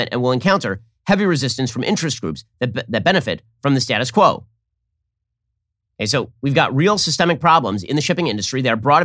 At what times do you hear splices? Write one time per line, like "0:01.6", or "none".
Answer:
none